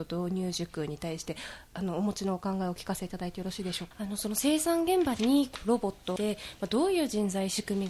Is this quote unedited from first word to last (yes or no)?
no